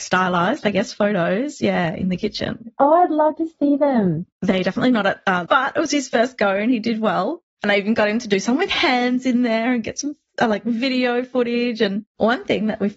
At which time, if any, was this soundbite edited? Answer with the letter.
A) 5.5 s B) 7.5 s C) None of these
A